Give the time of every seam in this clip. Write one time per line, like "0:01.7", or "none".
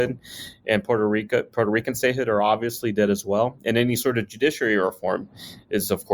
none